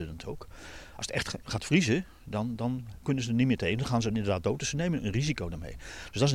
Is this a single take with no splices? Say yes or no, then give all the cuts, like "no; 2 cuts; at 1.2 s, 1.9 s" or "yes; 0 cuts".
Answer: yes; 0 cuts